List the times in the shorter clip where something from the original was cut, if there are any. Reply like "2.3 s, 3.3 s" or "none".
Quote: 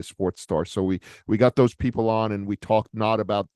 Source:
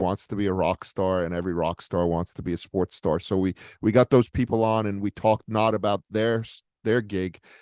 none